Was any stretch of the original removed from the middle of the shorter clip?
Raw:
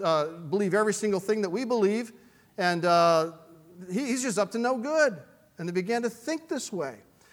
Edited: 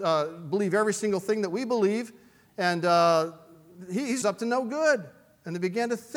yes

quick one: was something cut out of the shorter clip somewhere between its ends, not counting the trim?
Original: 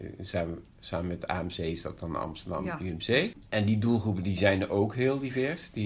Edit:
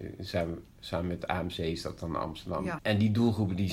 yes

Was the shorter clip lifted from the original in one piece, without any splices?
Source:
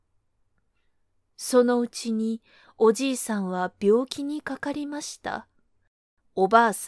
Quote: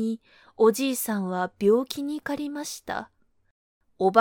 no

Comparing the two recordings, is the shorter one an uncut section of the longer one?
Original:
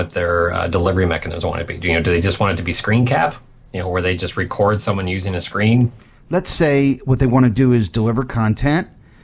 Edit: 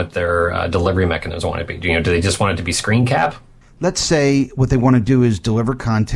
no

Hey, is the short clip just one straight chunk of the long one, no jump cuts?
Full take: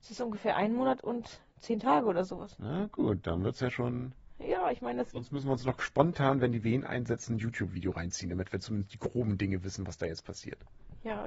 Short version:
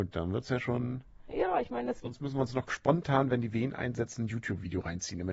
yes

